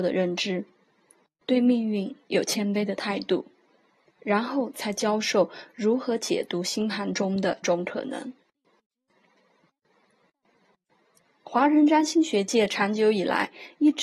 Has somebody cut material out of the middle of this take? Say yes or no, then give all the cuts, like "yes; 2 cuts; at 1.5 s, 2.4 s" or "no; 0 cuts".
yes; 1 cut; at 7.6 s